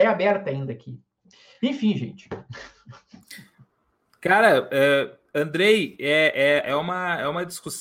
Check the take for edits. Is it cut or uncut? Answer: uncut